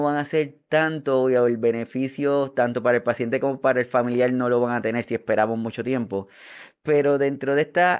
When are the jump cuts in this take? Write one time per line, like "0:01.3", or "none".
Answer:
none